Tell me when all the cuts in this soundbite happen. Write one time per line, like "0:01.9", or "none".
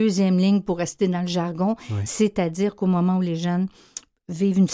none